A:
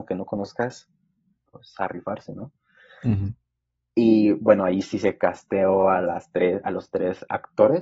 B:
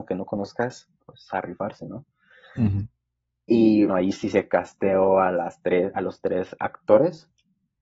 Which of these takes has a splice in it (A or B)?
B